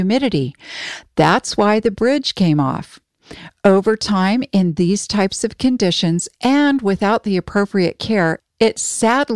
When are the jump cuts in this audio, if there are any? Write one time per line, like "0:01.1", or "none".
none